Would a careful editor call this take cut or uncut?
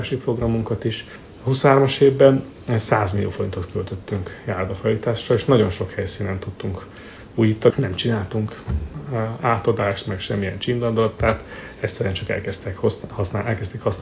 cut